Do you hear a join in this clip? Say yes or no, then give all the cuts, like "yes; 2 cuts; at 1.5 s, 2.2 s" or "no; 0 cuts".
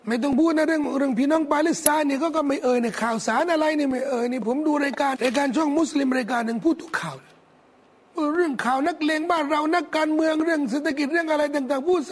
yes; 1 cut; at 5.1 s